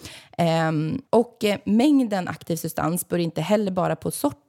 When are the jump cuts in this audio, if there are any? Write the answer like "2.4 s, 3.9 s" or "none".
1.1 s